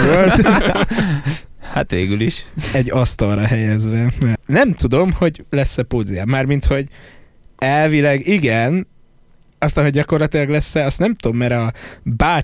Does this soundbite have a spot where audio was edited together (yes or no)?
yes